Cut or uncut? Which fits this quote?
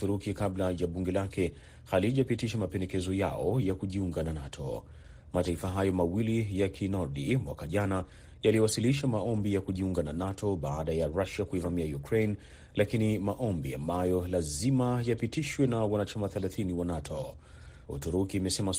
cut